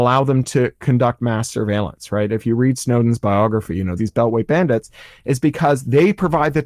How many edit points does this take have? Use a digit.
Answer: 1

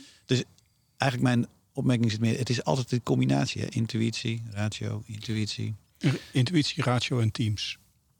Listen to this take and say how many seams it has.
0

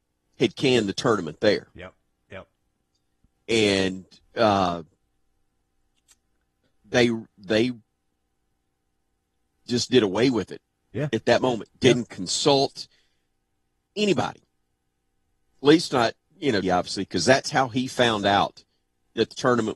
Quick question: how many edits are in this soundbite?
1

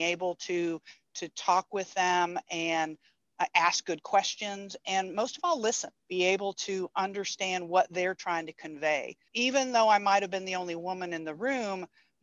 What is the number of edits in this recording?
2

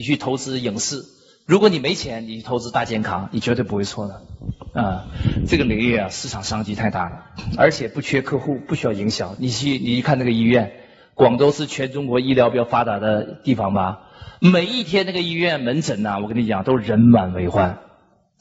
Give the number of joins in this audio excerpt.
1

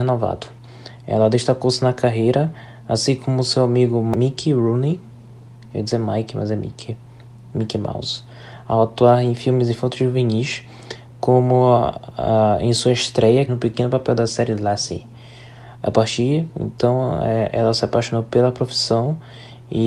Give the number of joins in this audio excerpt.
1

